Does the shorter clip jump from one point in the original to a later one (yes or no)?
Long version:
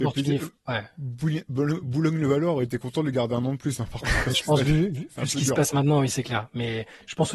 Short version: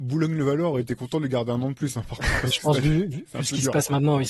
no